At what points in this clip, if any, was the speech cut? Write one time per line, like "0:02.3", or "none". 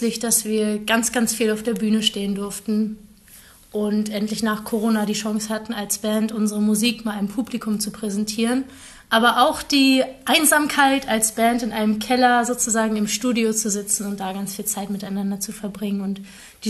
none